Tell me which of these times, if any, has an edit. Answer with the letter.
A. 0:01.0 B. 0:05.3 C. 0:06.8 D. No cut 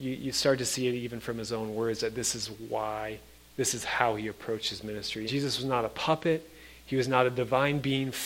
B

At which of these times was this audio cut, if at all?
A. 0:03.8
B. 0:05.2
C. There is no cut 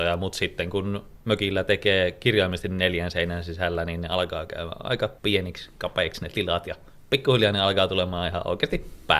B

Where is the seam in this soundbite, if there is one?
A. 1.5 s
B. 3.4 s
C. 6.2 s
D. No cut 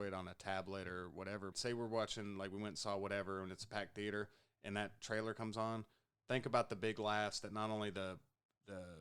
A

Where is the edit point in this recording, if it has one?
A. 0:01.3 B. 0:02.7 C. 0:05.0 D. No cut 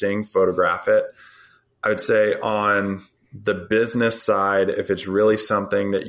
D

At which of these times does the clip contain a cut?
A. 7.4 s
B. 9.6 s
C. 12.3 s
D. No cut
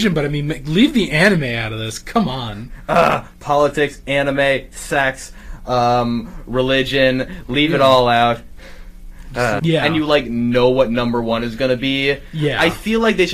B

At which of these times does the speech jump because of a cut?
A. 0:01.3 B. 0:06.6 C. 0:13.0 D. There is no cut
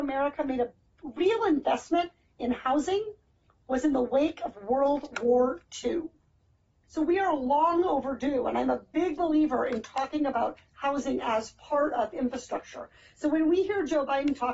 D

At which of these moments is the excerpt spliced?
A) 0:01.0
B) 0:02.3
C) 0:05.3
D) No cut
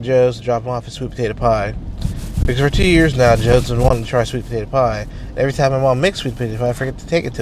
D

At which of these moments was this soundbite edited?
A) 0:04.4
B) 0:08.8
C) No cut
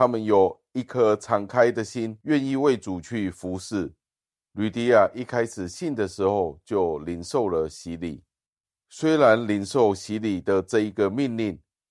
A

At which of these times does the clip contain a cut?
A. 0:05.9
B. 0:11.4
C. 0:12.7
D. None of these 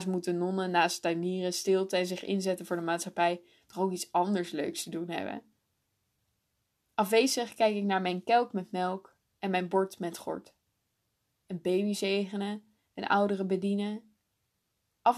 B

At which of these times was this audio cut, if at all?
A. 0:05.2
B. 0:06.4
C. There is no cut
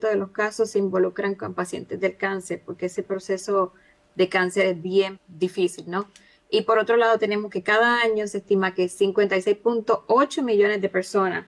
A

